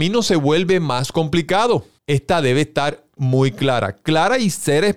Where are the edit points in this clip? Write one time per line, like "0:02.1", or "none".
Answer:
0:02.0
0:03.2